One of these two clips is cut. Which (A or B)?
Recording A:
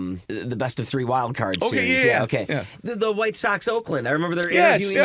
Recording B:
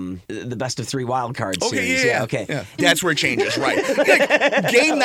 B